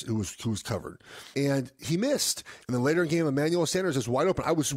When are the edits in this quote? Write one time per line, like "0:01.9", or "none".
0:01.3
0:02.6